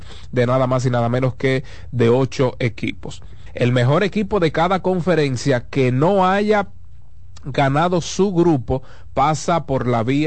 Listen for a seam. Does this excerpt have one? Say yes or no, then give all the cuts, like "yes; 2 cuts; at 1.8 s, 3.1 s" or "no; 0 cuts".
yes; 1 cut; at 3.5 s